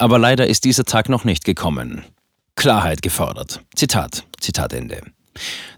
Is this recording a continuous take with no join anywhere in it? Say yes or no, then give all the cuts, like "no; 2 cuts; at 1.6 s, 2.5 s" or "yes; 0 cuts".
no; 1 cut; at 4.4 s